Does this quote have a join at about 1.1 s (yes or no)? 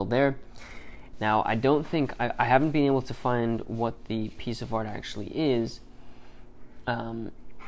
yes